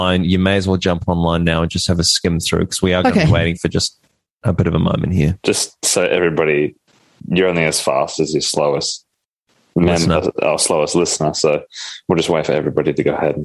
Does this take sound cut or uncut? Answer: uncut